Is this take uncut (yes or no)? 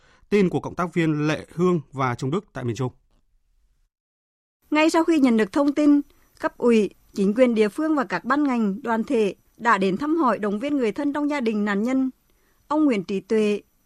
yes